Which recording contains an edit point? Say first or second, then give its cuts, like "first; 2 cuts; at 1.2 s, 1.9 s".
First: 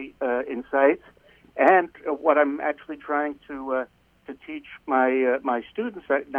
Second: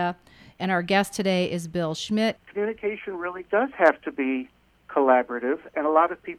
second; 1 cut; at 2.4 s